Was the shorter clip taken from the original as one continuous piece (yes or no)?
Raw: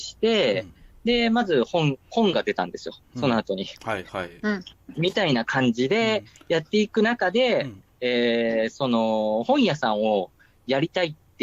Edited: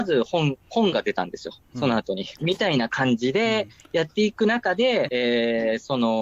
no